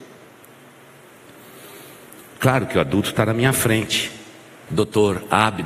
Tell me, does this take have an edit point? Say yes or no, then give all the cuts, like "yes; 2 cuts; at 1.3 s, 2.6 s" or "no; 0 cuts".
yes; 1 cut; at 4.7 s